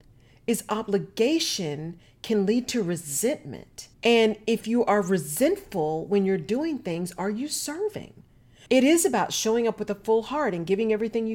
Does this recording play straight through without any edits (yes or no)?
no